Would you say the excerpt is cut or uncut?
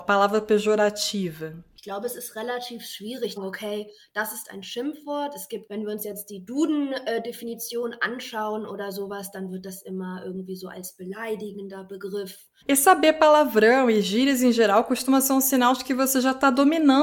cut